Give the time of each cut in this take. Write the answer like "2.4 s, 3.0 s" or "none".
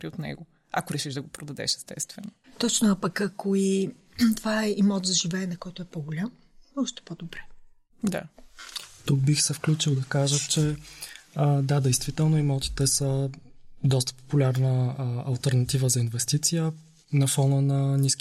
none